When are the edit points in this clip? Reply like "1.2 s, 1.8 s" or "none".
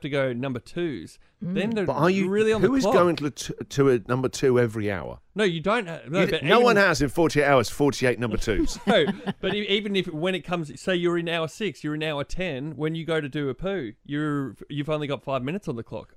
none